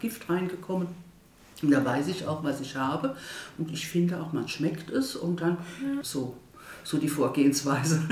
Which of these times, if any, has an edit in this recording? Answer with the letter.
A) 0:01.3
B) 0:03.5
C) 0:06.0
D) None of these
C